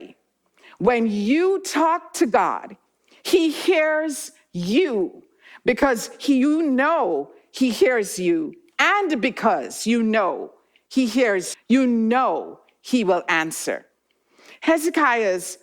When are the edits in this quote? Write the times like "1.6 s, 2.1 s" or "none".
11.5 s